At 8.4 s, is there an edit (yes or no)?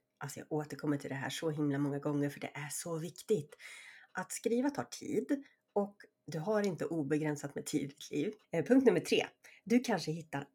yes